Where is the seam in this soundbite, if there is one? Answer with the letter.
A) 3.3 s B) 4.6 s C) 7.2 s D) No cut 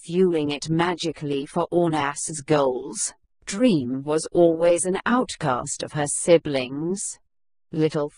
A